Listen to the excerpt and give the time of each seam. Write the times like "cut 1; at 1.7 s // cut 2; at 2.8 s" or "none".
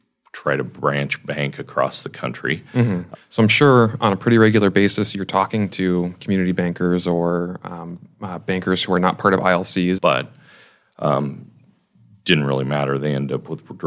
cut 1; at 3.1 s // cut 2; at 10.0 s